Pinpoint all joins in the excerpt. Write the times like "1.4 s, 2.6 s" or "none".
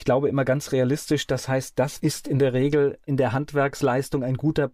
2.0 s